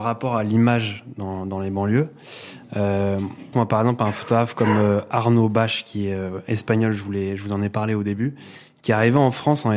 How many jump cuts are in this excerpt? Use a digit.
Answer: 1